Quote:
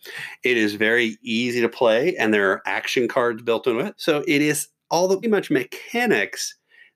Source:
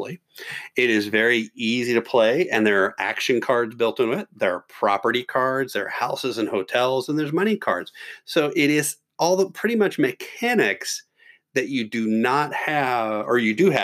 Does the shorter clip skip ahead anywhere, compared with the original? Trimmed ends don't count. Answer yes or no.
yes